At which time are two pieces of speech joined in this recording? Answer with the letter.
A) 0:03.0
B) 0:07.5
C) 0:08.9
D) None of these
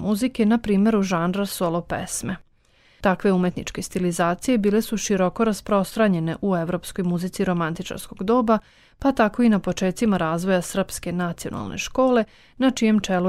A